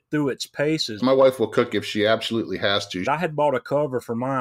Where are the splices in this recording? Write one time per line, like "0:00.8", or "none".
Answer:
0:01.0
0:03.1

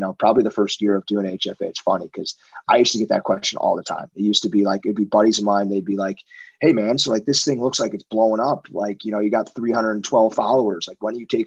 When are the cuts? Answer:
none

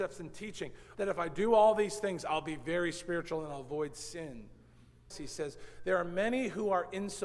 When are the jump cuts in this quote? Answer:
0:00.9
0:05.1

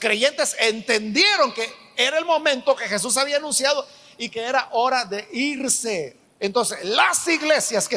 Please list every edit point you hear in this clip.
0:06.2

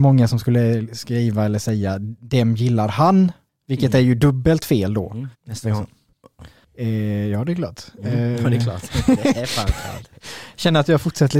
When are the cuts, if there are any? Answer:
0:05.3
0:06.4

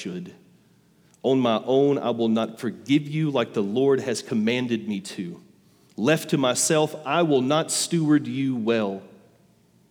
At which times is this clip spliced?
none

